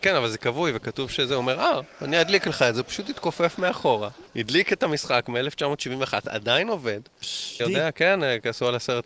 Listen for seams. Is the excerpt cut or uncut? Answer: cut